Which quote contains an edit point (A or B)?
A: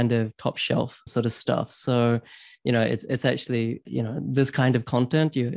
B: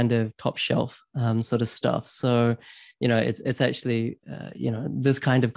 A